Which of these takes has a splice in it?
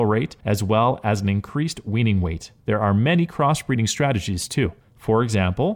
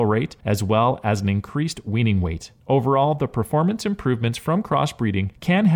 first; 1 cut; at 2.6 s

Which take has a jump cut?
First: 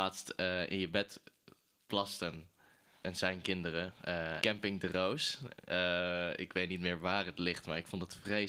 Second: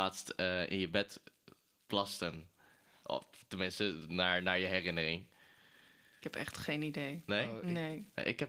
first; 2 cuts; at 3.0 s, 4.4 s

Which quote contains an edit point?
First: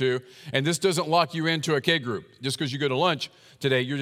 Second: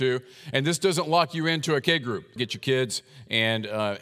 second; 1 cut; at 2.4 s

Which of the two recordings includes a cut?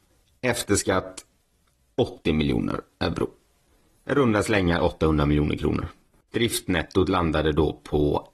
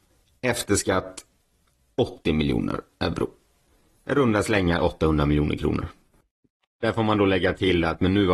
first; 1 cut; at 6.3 s

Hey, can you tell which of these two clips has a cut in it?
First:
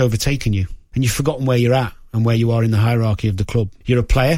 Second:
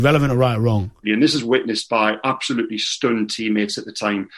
second; 1 cut; at 1.0 s

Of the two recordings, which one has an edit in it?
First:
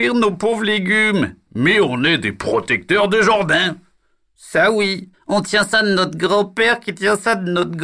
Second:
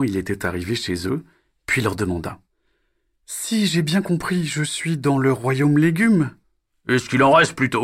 first; 1 cut; at 5.1 s

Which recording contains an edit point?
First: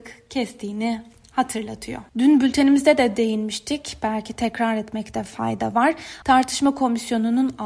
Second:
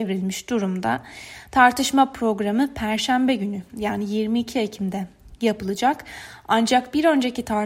first; 2 cuts; at 2.1 s, 6.2 s

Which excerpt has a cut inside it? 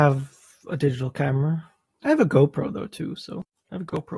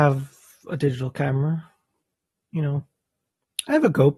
first; 1 cut; at 2.0 s

